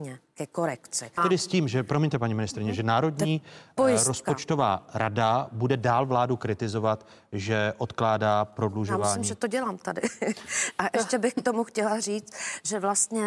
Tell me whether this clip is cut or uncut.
cut